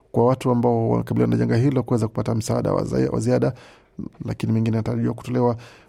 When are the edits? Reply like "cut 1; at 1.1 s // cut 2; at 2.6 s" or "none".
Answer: cut 1; at 4.1 s

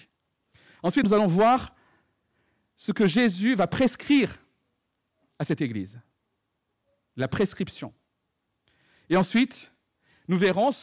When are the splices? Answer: cut 1; at 1.0 s

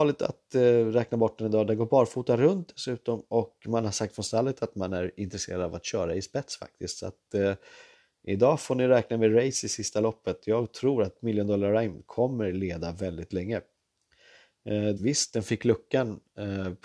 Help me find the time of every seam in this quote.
cut 1; at 15.0 s

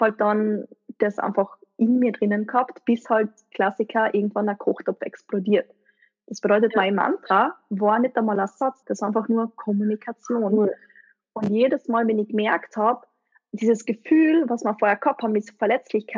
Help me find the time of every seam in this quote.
cut 1; at 8.8 s

